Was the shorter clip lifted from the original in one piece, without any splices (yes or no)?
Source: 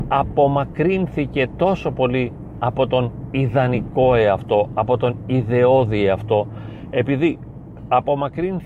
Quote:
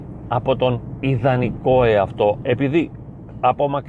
no